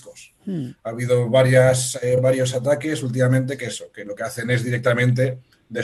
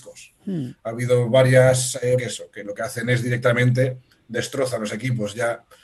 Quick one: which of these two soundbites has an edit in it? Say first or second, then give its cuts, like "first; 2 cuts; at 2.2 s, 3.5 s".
second; 1 cut; at 2.2 s